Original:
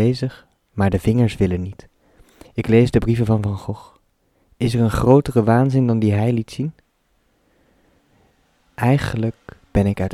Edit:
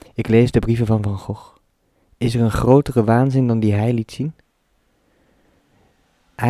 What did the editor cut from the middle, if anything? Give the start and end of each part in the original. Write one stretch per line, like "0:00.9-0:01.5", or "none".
none